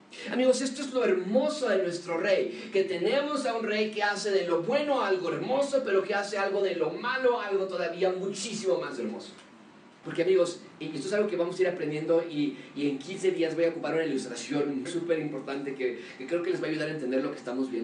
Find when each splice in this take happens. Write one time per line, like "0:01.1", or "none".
0:10.0
0:14.9